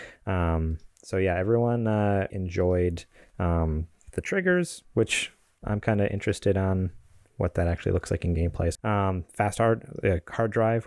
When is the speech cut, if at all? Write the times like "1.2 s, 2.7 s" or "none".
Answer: 2.3 s, 8.8 s